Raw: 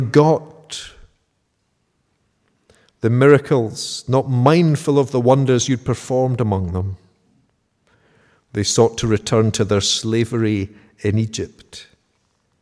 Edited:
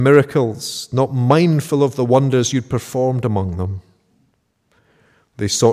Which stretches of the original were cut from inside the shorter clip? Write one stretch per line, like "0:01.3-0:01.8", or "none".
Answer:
none